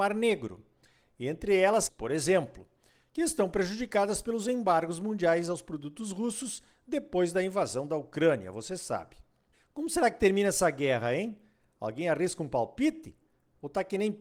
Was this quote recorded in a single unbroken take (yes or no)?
no